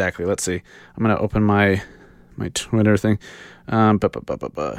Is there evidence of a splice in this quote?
no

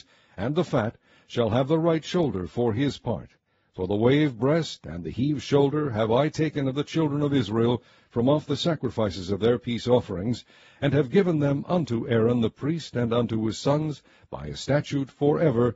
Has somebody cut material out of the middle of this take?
no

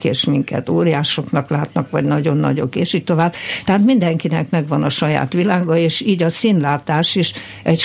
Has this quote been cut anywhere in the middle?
no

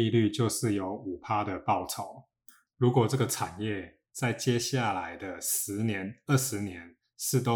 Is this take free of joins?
yes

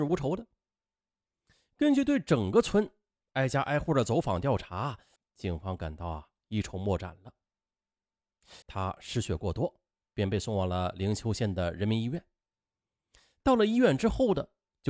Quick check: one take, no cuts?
no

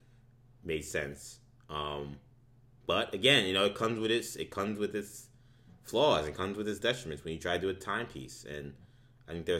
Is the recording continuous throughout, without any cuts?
yes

